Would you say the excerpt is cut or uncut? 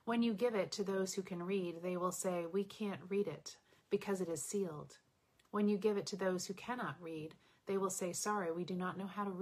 uncut